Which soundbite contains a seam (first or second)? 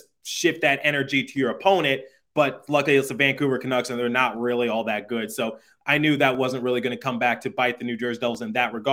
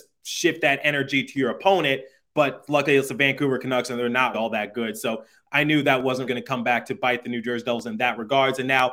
second